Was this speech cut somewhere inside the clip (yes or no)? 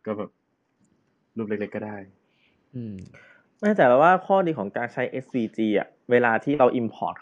no